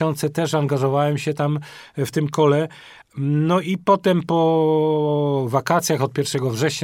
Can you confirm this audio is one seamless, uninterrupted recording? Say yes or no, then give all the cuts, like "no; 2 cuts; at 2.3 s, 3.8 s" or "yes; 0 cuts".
yes; 0 cuts